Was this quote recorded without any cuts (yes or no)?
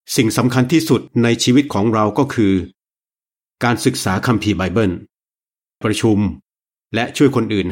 no